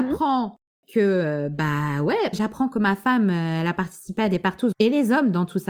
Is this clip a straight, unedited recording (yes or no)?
no